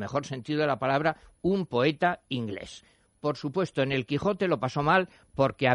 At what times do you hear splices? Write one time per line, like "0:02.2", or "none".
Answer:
none